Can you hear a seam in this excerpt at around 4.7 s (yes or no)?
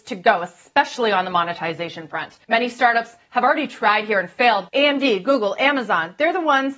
yes